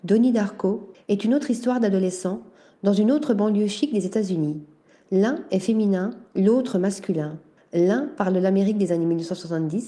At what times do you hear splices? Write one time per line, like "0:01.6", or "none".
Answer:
0:00.9
0:07.6